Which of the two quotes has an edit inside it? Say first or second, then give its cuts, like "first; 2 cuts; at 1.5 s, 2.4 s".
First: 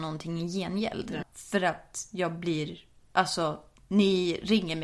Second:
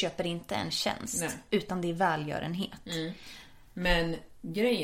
first; 1 cut; at 1.2 s